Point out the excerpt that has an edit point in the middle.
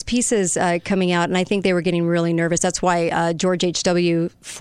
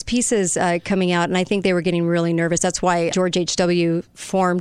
second; 1 cut; at 3.1 s

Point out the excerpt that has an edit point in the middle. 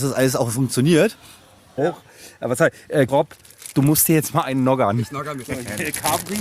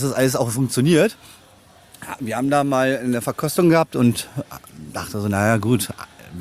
first; 3 cuts; at 1.8 s, 3.1 s, 5.4 s

